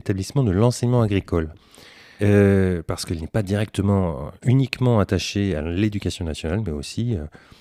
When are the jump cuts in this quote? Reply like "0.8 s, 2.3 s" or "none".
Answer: 2.2 s

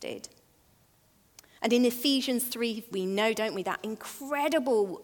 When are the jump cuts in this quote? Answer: 1.6 s, 2.9 s

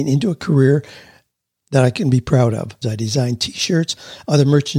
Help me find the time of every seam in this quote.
2.8 s

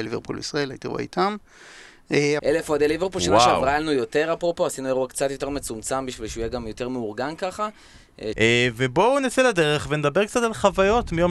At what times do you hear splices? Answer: 2.4 s, 8.3 s

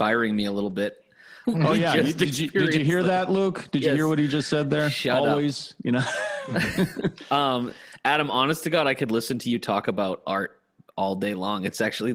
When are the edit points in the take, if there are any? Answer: 1.4 s

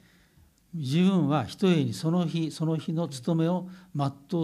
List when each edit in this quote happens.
none

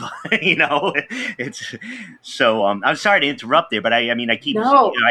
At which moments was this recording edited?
none

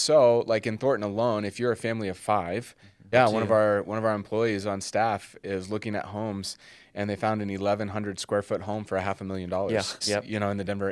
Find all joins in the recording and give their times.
3.1 s, 10.0 s

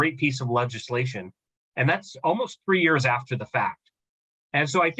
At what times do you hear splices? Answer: 1.6 s

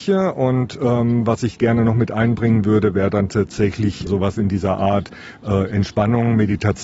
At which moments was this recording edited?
4.1 s

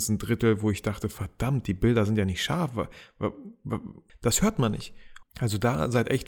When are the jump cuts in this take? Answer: 4.1 s, 5.2 s

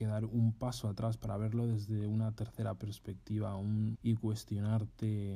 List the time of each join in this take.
3.9 s

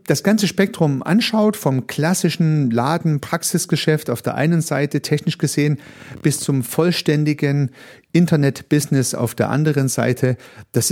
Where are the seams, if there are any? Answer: none

